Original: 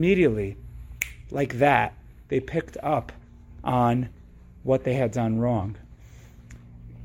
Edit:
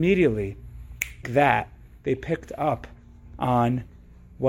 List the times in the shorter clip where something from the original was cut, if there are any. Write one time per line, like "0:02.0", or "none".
0:01.2